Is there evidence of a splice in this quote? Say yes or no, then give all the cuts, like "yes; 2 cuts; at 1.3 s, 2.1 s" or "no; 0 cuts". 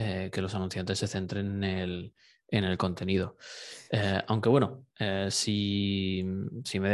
no; 0 cuts